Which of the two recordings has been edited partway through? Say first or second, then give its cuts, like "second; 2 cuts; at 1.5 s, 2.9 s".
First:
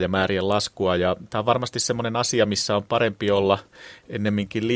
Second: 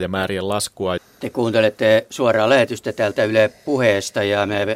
second; 1 cut; at 1.0 s